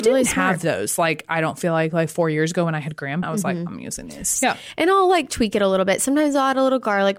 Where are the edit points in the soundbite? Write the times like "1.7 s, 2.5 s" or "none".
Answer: 3.2 s, 4.4 s